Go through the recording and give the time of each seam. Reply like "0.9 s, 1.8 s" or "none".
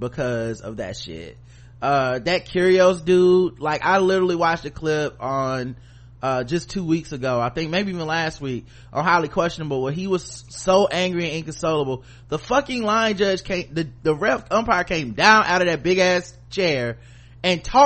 none